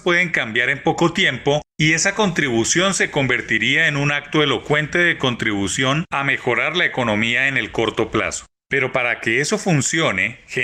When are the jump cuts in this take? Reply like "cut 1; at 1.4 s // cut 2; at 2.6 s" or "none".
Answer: cut 1; at 8.6 s